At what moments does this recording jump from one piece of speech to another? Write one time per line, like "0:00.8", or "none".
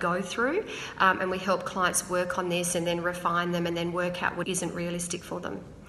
0:04.4